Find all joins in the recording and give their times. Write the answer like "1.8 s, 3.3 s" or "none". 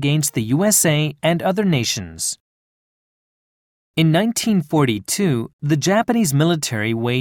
1.2 s